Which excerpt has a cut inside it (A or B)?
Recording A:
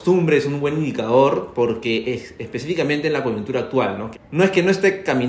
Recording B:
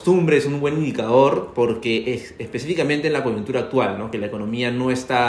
A